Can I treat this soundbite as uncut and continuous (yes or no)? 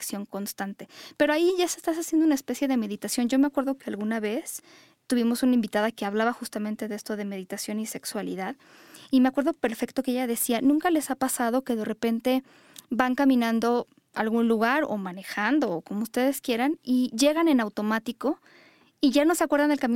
yes